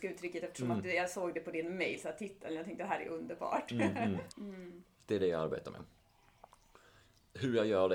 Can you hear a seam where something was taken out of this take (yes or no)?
yes